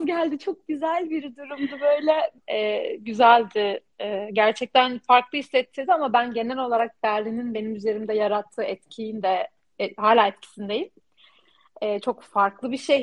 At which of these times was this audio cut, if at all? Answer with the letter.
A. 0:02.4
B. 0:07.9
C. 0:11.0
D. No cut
A